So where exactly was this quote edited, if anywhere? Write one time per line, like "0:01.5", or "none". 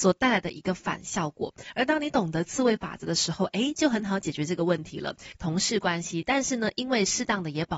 0:05.3